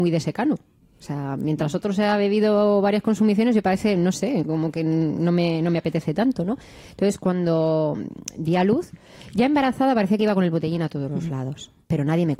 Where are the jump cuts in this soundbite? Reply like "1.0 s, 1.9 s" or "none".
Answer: none